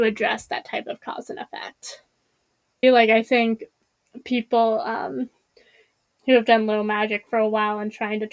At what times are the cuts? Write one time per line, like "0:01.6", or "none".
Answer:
0:02.8